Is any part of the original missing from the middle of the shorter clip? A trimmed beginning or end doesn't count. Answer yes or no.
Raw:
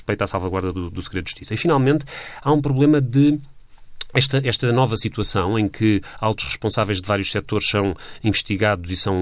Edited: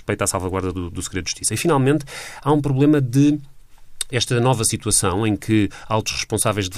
yes